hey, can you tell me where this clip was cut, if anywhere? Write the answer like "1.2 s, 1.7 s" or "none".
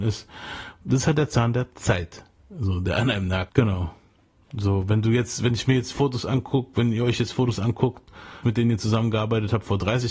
3.5 s, 8.4 s